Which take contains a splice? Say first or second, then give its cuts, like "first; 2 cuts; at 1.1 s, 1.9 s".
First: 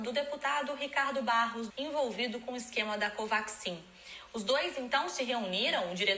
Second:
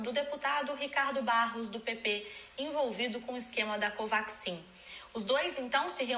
first; 1 cut; at 1.7 s